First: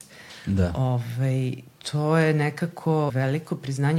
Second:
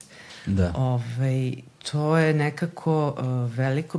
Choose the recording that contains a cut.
first; 1 cut; at 3.1 s

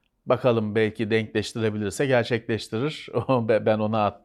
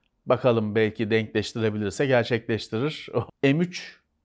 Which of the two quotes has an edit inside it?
second; 1 cut; at 3.3 s

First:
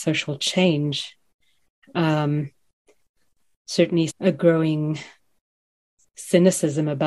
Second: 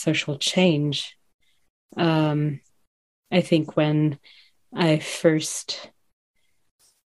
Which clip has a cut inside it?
first; 2 cuts; at 1.8 s, 4.1 s

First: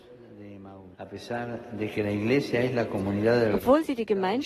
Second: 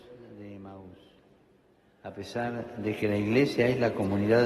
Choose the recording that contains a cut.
first; 1 cut; at 0.9 s

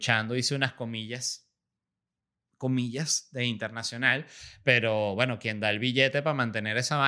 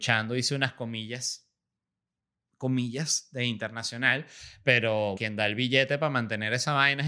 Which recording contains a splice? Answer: second; 1 cut; at 5.2 s

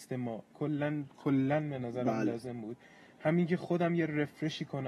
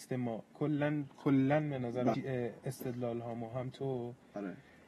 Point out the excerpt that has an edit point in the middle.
second; 1 cut; at 2.1 s

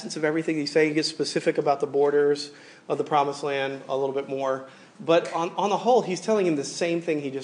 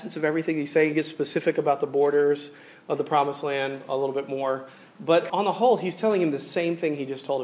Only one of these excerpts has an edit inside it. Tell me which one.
second; 1 cut; at 5.3 s

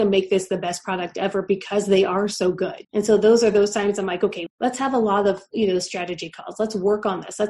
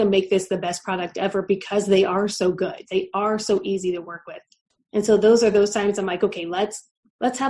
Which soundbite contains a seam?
first; 2 cuts; at 2.8 s, 4.5 s

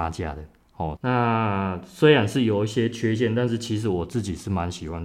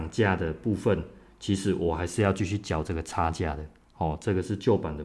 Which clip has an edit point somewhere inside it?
first; 1 cut; at 1.0 s

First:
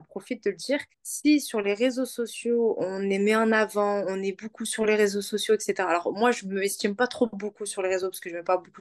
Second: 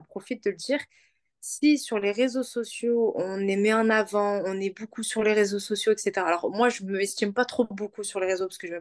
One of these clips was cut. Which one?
first; 1 cut; at 0.9 s

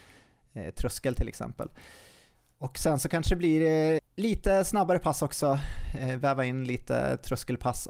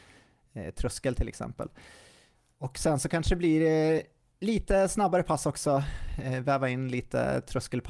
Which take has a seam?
first; 1 cut; at 4.0 s

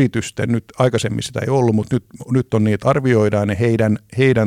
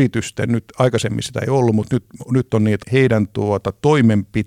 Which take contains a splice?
second; 1 cut; at 2.8 s

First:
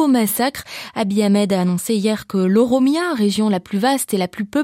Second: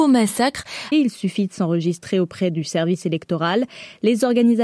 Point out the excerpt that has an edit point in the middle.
second; 1 cut; at 0.9 s

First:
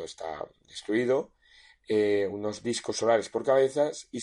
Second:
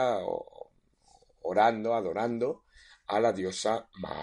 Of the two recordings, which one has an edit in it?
first; 1 cut; at 2.3 s

